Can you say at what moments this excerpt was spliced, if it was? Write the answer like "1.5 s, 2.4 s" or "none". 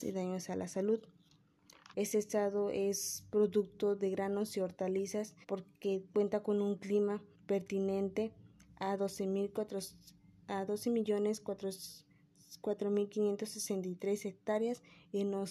1.9 s, 5.4 s, 7.3 s